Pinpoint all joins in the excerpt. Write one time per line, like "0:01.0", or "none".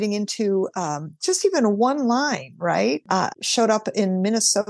0:03.3